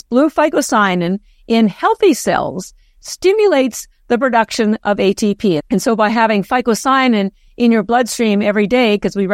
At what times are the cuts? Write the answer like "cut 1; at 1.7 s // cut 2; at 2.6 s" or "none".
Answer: cut 1; at 5.6 s